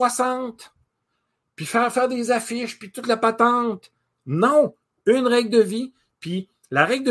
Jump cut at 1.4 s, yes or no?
no